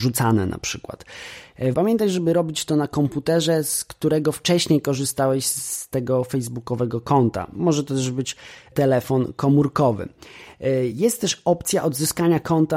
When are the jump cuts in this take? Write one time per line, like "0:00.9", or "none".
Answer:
0:01.7

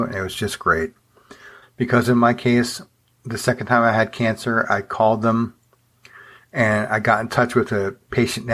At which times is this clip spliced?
0:01.6

